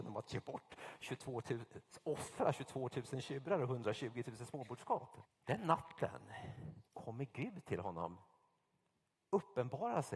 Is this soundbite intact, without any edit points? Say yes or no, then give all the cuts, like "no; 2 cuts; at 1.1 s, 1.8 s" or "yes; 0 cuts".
no; 2 cuts; at 5.2 s, 6.9 s